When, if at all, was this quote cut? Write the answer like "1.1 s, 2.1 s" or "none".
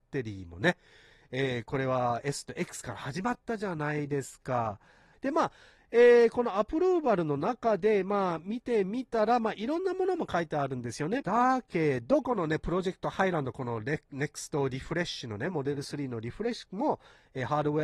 5.1 s, 11.2 s